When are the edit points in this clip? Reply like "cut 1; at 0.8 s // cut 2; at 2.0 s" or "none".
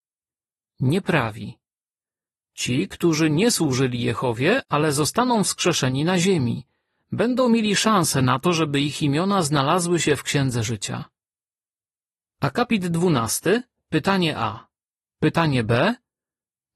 cut 1; at 15.0 s